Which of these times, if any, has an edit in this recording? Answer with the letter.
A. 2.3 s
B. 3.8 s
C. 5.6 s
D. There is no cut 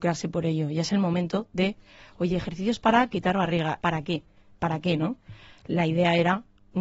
B